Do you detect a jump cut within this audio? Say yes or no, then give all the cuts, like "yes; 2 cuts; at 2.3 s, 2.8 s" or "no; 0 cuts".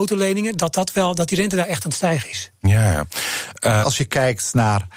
yes; 1 cut; at 3.8 s